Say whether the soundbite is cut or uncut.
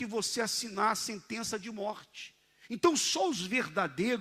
uncut